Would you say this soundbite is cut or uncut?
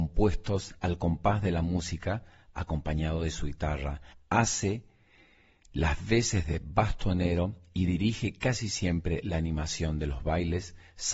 uncut